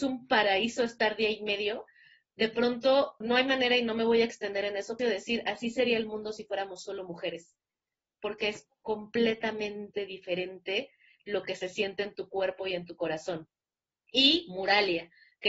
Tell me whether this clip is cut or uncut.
cut